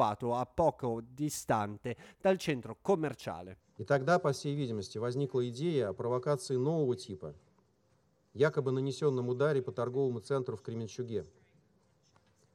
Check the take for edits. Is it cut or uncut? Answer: uncut